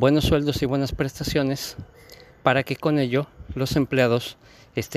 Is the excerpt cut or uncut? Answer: uncut